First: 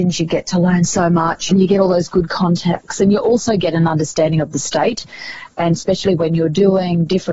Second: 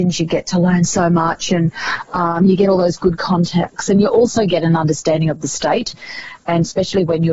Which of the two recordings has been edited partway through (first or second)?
first